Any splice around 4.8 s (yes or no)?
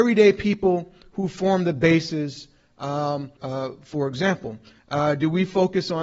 yes